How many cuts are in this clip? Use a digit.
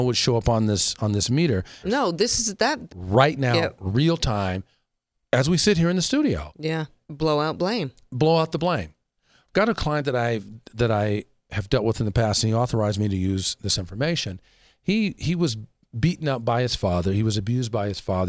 3